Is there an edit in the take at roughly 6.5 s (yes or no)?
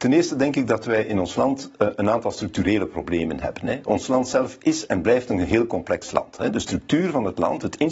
no